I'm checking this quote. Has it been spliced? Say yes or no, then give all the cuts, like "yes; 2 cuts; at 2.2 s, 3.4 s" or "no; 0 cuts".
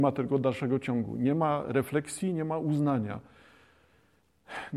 no; 0 cuts